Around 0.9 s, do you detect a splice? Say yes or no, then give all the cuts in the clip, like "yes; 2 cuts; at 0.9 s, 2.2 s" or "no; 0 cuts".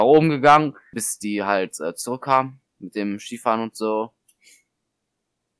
yes; 1 cut; at 0.9 s